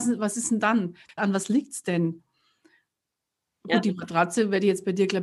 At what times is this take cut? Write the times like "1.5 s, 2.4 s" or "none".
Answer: 1.2 s